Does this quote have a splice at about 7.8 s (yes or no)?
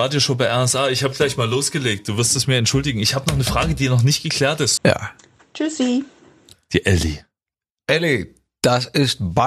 no